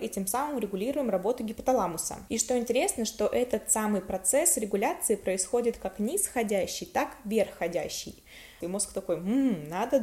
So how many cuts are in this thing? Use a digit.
2